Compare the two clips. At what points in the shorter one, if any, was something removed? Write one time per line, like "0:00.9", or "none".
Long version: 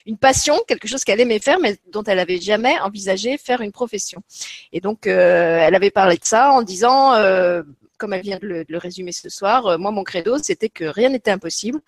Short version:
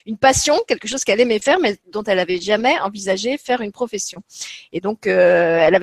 none

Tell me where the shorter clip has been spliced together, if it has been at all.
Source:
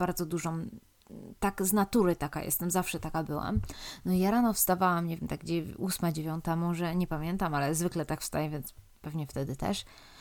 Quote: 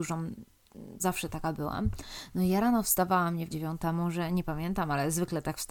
0:01.0
0:03.5

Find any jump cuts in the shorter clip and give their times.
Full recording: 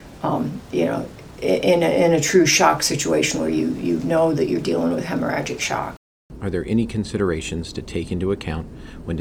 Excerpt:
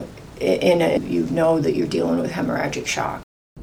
0:01.0

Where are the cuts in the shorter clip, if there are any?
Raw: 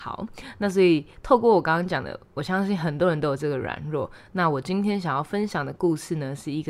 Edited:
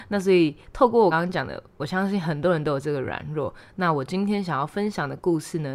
0:01.1

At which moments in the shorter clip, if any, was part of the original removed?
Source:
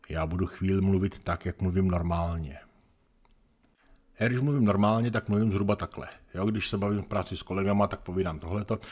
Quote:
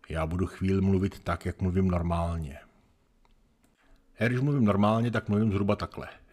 none

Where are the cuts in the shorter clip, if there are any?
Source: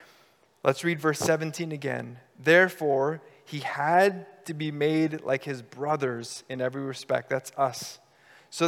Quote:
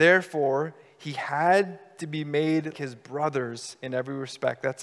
0:02.7

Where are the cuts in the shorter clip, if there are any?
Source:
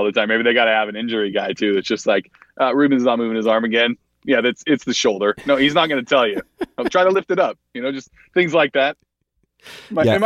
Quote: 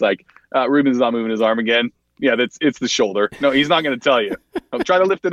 none

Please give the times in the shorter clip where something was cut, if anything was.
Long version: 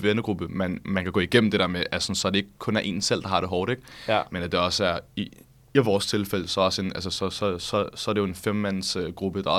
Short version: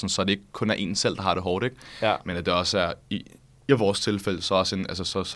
none

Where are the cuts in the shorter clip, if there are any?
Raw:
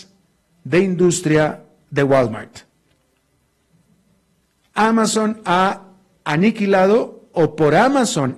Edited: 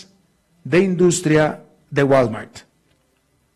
none

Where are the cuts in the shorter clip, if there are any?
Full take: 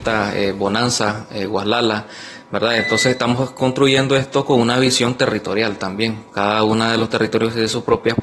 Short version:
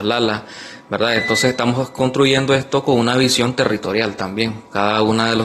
none

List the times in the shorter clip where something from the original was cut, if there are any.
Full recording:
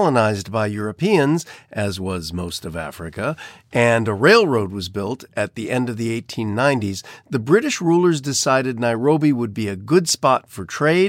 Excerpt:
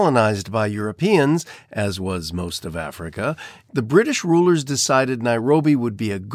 0:03.7

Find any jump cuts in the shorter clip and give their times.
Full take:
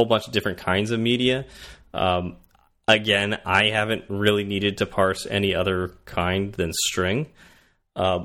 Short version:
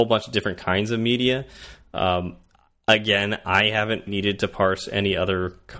0:04.1

